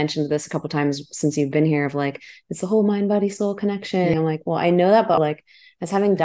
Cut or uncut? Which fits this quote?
cut